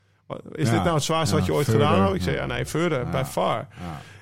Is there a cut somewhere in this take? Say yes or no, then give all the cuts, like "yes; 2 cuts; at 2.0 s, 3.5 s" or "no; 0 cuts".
no; 0 cuts